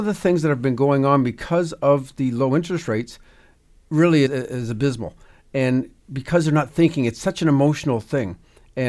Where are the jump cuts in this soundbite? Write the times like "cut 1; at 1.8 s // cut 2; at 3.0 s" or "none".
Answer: cut 1; at 4.3 s